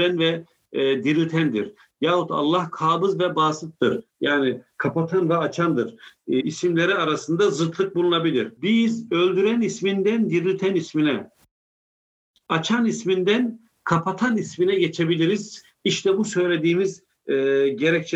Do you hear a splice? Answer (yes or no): yes